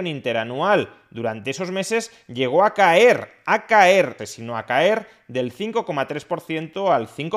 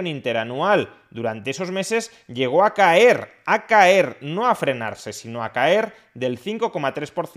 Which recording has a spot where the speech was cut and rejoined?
first; 1 cut; at 4.2 s

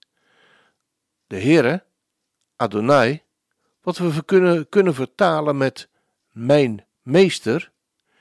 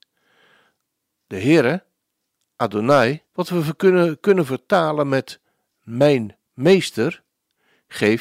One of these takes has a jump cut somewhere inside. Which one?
second; 1 cut; at 3.3 s

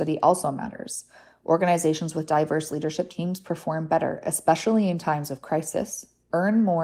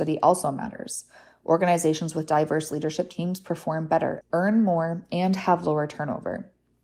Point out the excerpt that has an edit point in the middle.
second; 1 cut; at 4.2 s

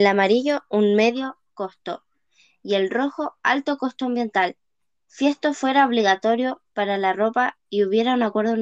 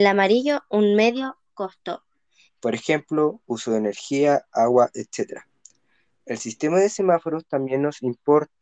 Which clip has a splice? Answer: second; 1 cut; at 2.5 s

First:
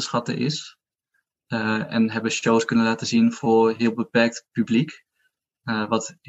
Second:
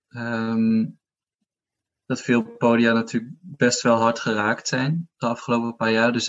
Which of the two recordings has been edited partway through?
first; 1 cut; at 1.3 s

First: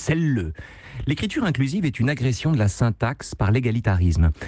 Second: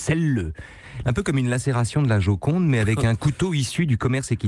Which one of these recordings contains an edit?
second; 1 cut; at 1.0 s

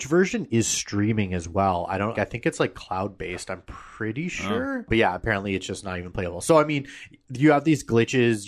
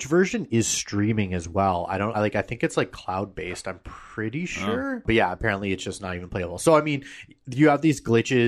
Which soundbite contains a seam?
first; 1 cut; at 2.1 s

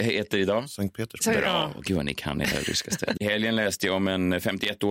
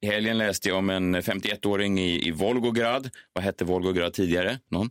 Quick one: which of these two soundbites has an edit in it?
first; 1 cut; at 3.2 s

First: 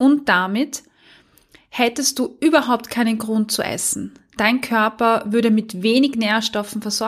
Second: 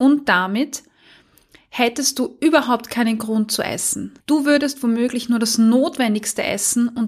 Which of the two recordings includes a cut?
second; 1 cut; at 4.2 s

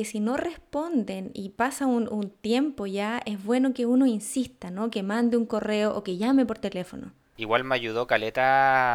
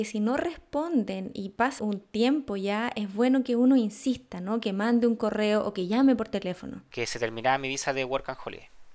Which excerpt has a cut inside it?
second; 2 cuts; at 1.8 s, 6.9 s

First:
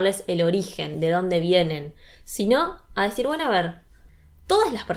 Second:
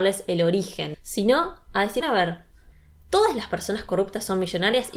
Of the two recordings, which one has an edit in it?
second; 2 cuts; at 0.9 s, 2.0 s

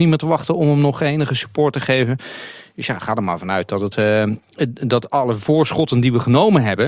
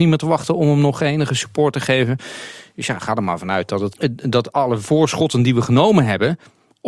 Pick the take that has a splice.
second; 1 cut; at 3.9 s

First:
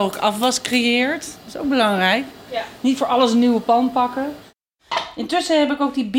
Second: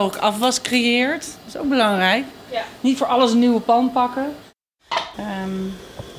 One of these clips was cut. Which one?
second; 1 cut; at 5.1 s

